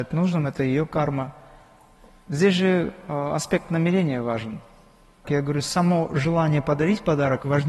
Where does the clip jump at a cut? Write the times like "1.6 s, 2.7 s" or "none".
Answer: 5.2 s